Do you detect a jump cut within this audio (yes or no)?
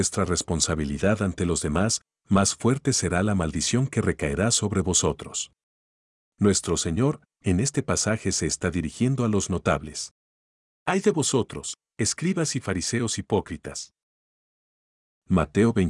no